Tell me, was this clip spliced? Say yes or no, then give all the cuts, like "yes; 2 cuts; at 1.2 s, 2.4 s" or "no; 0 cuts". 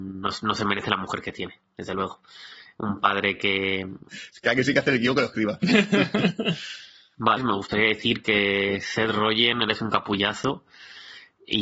yes; 2 cuts; at 4.1 s, 7.4 s